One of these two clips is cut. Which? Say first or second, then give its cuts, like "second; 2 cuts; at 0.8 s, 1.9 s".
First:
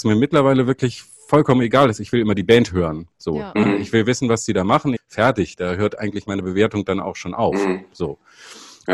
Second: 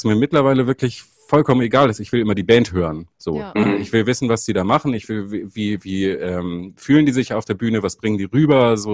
first; 1 cut; at 5.0 s